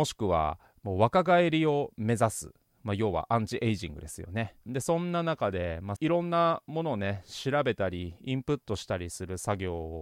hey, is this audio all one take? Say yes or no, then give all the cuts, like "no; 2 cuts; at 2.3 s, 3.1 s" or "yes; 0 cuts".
no; 2 cuts; at 4.6 s, 6.0 s